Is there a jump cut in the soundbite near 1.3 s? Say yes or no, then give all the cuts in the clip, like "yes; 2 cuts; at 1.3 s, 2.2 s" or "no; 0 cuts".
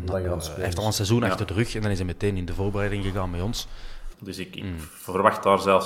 no; 1 cut; at 4.1 s